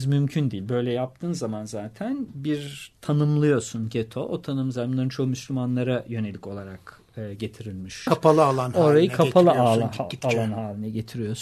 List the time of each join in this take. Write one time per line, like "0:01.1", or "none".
0:08.1